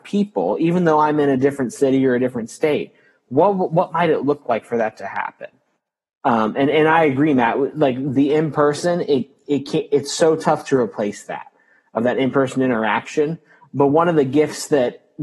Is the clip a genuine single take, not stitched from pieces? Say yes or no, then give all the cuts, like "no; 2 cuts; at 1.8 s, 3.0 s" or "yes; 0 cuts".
yes; 0 cuts